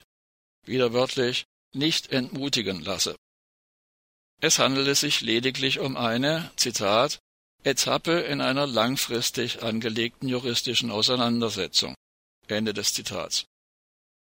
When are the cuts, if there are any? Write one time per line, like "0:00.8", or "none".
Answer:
none